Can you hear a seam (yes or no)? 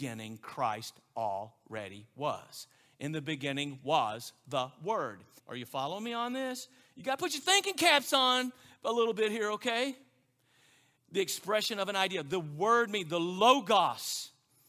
yes